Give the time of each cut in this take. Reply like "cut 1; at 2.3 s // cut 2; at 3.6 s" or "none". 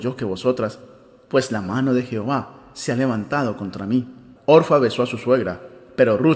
cut 1; at 4.4 s